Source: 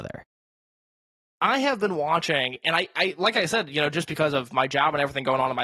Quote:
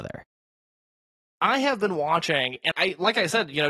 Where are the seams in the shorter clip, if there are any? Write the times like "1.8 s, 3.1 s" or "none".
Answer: 2.7 s